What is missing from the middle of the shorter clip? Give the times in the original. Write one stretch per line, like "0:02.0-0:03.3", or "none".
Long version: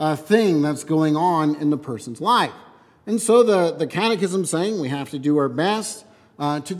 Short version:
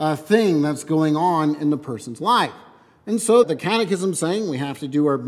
0:03.4-0:03.7